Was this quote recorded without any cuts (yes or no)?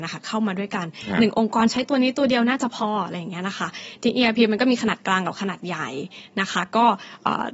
yes